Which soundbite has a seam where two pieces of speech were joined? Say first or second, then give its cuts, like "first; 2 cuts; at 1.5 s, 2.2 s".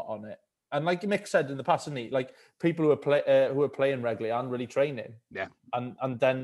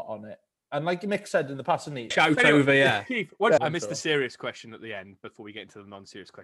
second; 2 cuts; at 2.1 s, 3.6 s